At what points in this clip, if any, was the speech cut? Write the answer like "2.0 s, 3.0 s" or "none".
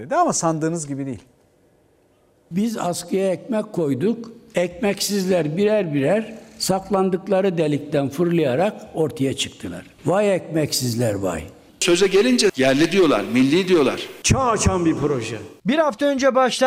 11.7 s, 14.2 s